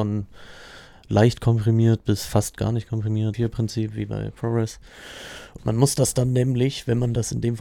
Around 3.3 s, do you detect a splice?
yes; 2 cuts; at 3.3 s, 5.6 s

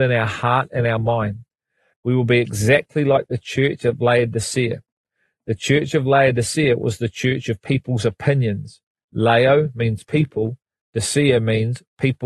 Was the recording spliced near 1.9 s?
yes; 1 cut; at 1.9 s

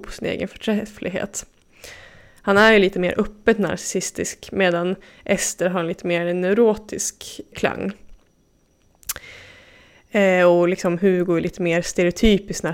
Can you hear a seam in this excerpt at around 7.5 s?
yes; 1 cut; at 7.5 s

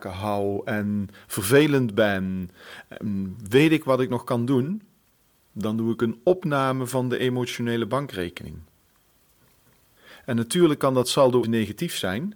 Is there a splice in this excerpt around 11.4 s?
yes; 1 cut; at 11.4 s

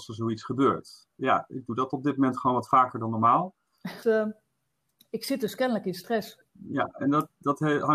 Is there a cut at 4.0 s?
yes; 2 cuts; at 4.0 s, 6.5 s

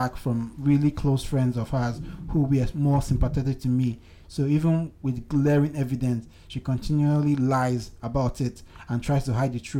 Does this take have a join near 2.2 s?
no; 1 cut; at 4.2 s

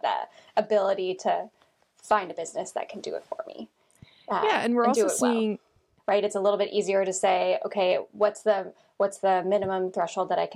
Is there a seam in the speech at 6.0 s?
yes; 1 cut; at 6.0 s

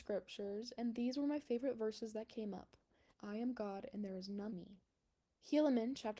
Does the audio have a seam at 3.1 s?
yes; 2 cuts; at 3.1 s, 4.5 s

